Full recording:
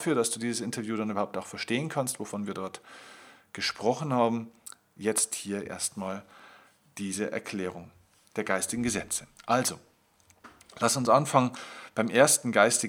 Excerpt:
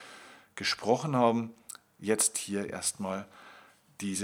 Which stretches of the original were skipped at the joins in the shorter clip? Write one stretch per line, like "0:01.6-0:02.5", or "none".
none